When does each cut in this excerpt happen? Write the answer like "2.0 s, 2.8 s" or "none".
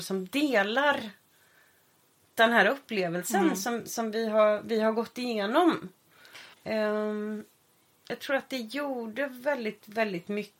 6.5 s

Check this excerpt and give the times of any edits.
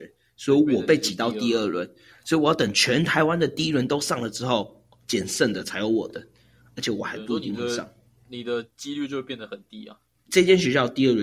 10.1 s

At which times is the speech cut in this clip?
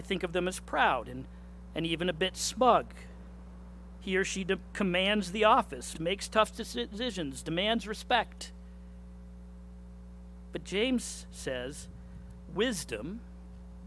5.9 s

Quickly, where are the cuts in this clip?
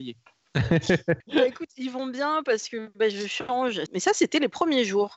1.2 s, 3.9 s

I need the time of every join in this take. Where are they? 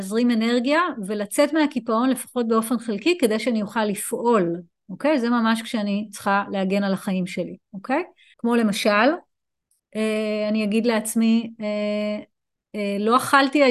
8.3 s

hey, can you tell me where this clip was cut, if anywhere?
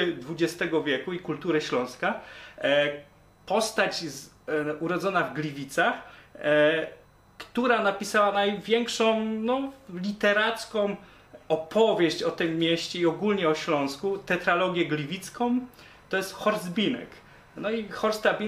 none

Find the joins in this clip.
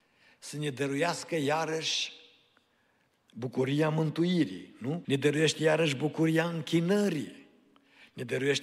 5.0 s

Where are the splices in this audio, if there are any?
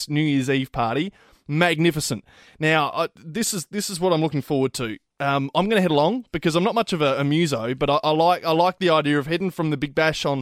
none

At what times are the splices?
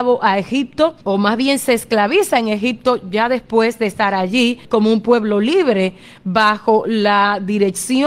1.0 s, 4.6 s

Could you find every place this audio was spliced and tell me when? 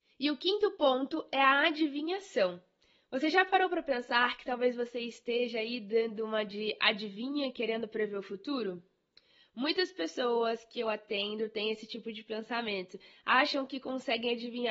none

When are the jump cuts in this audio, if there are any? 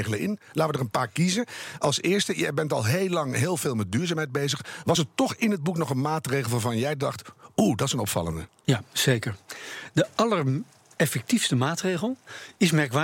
none

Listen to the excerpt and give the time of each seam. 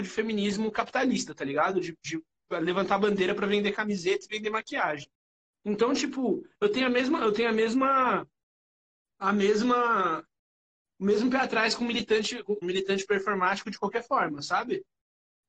12.6 s

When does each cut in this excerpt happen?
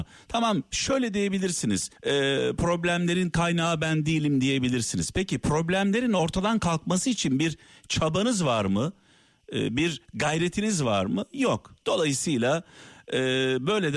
2.0 s

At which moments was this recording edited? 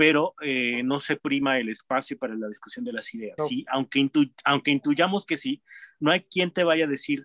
3.4 s

